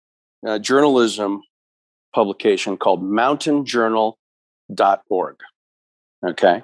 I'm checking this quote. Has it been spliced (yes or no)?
no